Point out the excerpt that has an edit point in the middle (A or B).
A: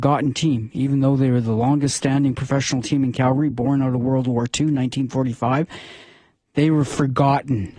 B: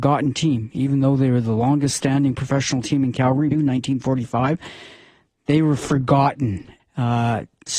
B